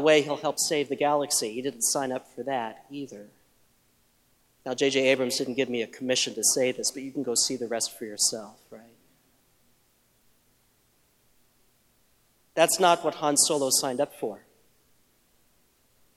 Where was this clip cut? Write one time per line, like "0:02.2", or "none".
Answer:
0:04.5